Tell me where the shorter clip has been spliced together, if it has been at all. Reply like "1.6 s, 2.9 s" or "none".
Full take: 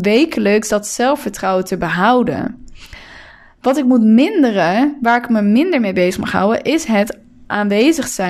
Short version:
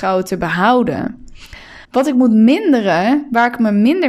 1.8 s